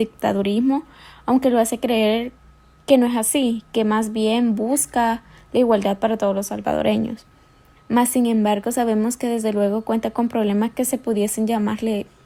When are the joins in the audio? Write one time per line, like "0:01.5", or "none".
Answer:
0:07.8